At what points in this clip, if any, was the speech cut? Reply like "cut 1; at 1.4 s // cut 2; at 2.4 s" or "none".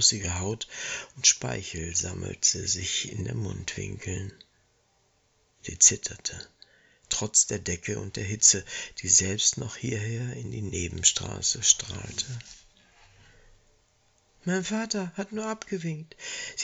none